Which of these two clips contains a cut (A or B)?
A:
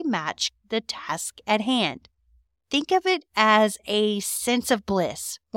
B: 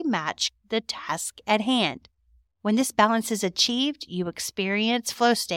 A